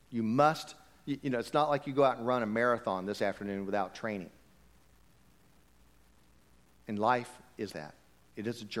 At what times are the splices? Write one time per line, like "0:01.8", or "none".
0:07.7